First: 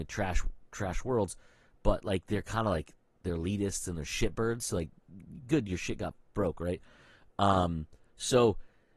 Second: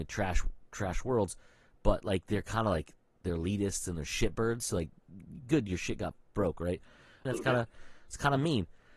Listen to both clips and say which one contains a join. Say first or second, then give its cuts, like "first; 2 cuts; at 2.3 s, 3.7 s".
second; 1 cut; at 7.3 s